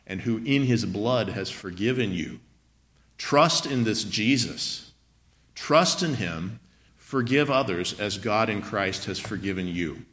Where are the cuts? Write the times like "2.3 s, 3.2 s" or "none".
6.9 s